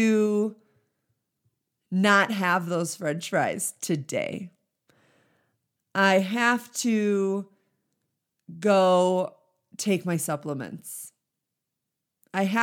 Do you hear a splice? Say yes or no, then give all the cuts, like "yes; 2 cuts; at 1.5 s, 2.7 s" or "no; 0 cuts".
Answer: no; 0 cuts